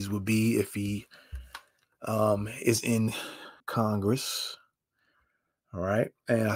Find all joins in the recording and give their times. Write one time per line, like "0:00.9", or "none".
0:03.6